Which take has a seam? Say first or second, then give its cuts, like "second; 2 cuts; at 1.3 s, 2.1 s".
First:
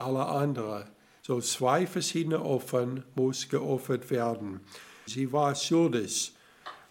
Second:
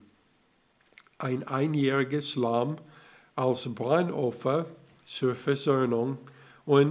first; 2 cuts; at 1.2 s, 5.1 s